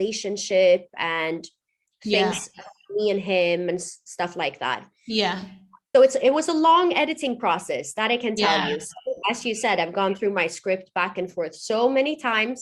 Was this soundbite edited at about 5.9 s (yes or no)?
yes